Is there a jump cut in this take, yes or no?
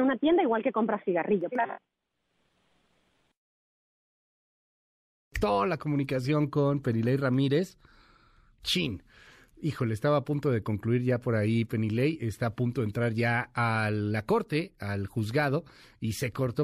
yes